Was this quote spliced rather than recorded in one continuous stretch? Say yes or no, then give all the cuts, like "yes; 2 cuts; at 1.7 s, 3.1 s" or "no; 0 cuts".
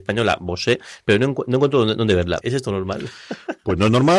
yes; 1 cut; at 2.4 s